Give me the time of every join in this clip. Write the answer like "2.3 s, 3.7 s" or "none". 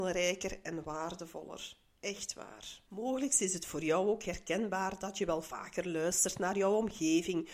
2.9 s